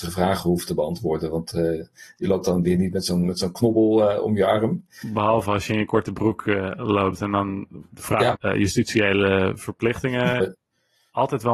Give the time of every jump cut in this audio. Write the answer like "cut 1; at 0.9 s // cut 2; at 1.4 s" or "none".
cut 1; at 8.3 s // cut 2; at 10.4 s